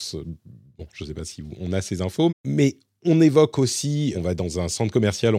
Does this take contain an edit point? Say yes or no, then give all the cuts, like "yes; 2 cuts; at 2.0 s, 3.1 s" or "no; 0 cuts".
yes; 2 cuts; at 2.3 s, 4.1 s